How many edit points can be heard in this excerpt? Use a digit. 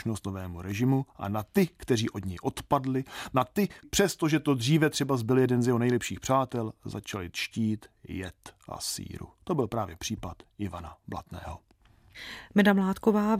1